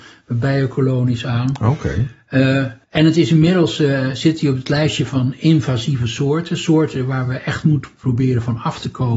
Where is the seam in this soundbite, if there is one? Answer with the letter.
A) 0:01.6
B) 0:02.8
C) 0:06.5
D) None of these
B